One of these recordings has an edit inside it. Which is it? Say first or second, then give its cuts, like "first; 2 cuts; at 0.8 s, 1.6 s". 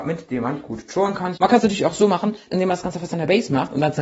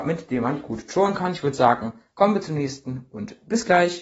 first; 2 cuts; at 1.3 s, 2.5 s